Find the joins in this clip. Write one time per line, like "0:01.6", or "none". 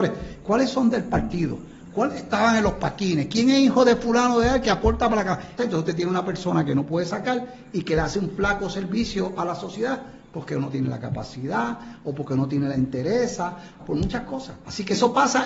0:05.6
0:13.8